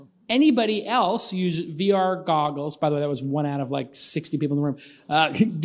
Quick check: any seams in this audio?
no; 0 cuts

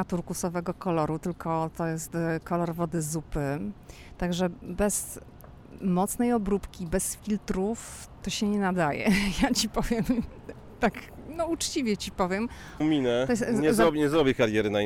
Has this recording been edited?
yes; 2 cuts; at 8.2 s, 12.8 s

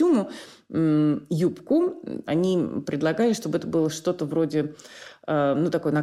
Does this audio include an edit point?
yes; 1 cut; at 2.3 s

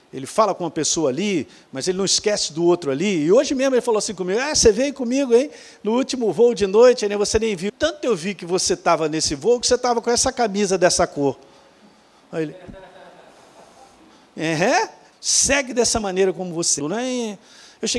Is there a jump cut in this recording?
yes; 3 cuts; at 7.7 s, 15.1 s, 16.8 s

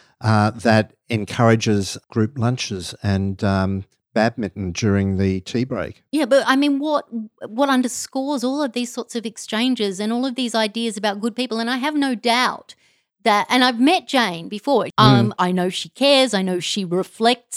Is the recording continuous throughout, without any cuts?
no; 1 cut; at 14.9 s

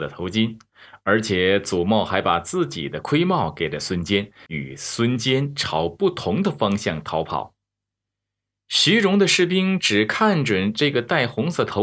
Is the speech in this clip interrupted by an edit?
yes; 1 cut; at 4.5 s

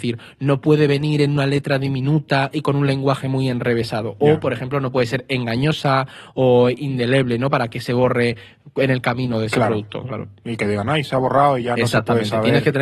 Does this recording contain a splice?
no; 0 cuts

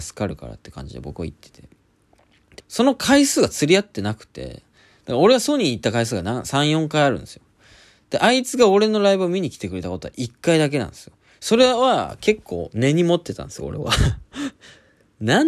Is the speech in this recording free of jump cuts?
no; 1 cut; at 2.6 s

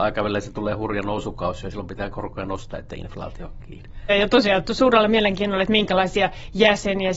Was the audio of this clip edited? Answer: yes; 1 cut; at 4.1 s

